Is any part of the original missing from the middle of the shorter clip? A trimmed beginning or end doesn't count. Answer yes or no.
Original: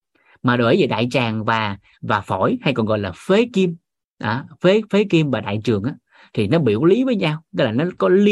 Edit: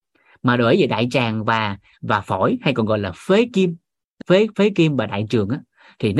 yes